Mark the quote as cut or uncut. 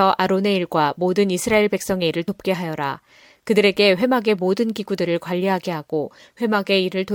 uncut